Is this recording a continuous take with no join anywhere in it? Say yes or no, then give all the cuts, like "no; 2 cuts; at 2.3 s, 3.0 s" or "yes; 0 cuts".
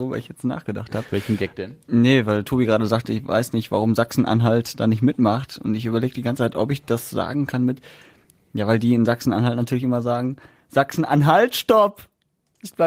yes; 0 cuts